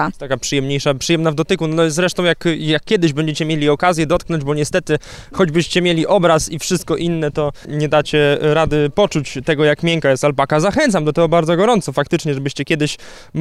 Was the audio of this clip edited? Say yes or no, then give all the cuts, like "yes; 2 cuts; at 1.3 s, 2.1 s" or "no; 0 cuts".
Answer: no; 0 cuts